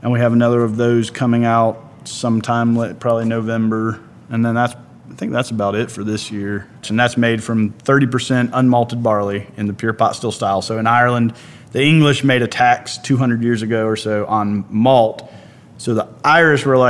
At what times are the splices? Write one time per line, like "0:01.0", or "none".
0:06.8